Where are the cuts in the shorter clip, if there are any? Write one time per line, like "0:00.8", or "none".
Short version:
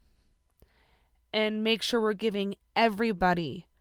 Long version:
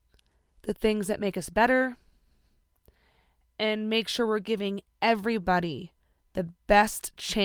none

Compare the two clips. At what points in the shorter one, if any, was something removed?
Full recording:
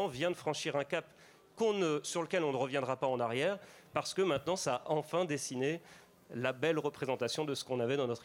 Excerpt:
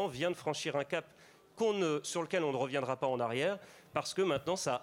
none

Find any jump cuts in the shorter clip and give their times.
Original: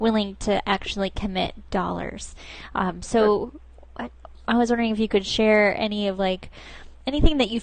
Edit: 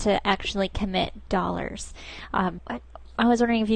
0:02.6

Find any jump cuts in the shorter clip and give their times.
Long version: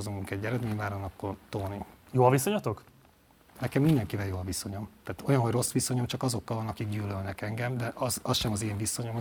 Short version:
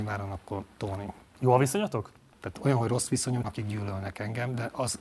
0:02.3
0:03.4

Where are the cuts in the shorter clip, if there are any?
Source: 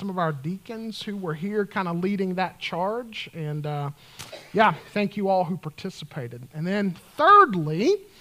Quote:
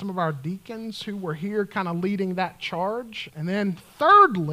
0:03.3

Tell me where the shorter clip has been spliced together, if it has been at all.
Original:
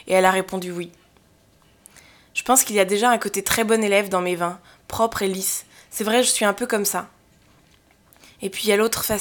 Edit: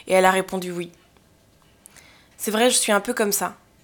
0:02.3

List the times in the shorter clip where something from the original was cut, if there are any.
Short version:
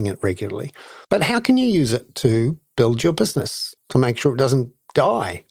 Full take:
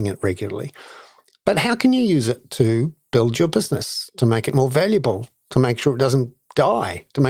0:01.0
0:03.8

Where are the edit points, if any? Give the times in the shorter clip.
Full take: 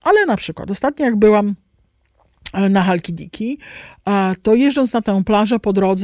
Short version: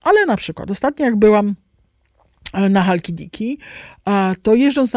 none

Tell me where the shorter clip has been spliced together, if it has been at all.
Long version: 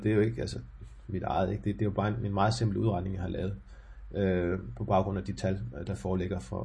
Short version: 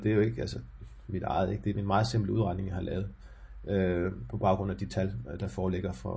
0:01.7

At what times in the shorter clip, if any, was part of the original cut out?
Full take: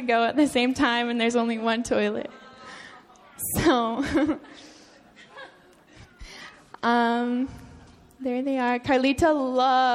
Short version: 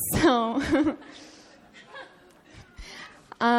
none

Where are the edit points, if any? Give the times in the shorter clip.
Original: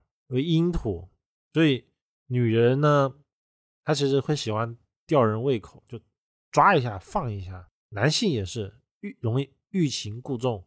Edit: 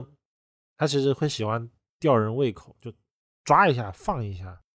none

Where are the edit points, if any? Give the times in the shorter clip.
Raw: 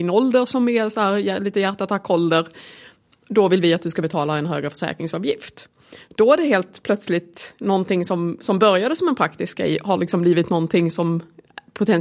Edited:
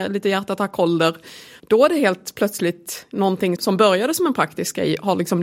0:01.6
0:03.6

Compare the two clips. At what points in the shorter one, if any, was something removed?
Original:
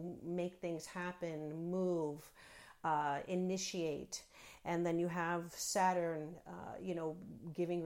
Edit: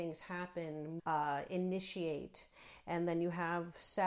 0:01.0

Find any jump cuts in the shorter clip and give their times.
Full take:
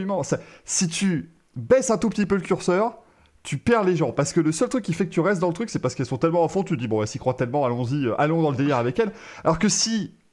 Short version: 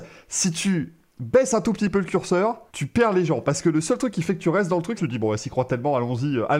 0:02.7
0:05.0

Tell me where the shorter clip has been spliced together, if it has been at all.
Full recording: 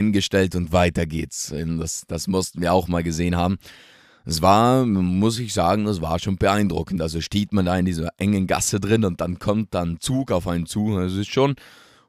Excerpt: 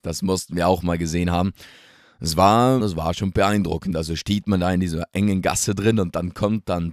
0:02.8

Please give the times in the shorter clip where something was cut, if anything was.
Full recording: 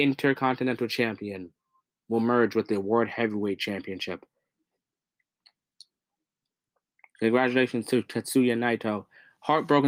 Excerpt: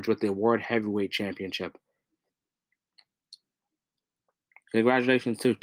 none

